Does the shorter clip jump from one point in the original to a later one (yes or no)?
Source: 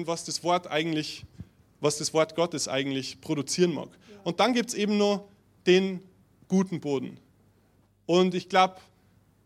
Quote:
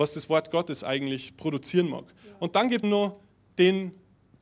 yes